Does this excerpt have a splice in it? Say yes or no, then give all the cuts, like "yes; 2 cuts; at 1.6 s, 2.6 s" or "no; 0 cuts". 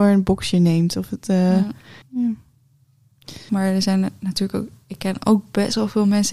yes; 2 cuts; at 2.0 s, 3.5 s